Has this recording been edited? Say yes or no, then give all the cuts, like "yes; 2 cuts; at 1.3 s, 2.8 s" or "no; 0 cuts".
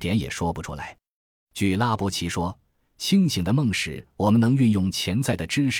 no; 0 cuts